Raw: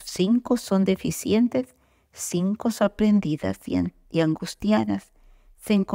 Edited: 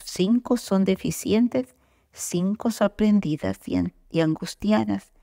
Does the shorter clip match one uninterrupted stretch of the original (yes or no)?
yes